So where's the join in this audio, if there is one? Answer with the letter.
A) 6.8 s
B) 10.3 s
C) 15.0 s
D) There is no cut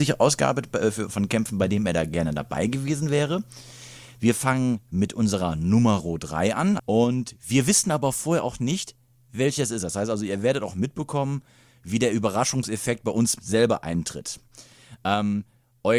A